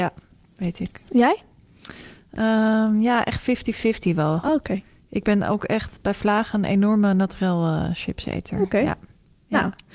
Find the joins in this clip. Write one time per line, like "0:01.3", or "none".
none